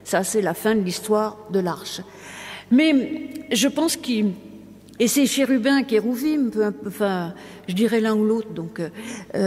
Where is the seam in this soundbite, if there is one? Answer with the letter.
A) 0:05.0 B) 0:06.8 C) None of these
A